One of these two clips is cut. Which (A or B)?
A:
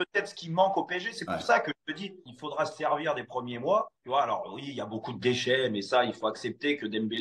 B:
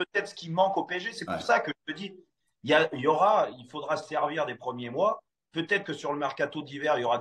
A